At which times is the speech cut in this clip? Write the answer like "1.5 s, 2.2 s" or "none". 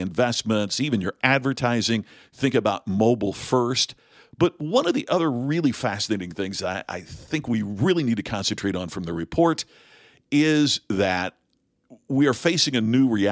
none